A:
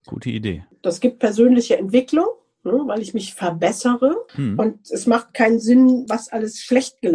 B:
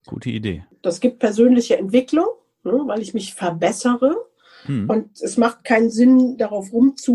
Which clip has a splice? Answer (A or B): A